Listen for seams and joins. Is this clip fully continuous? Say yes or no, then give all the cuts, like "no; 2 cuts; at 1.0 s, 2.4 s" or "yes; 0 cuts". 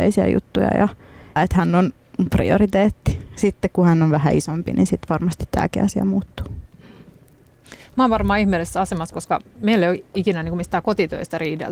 no; 1 cut; at 1.4 s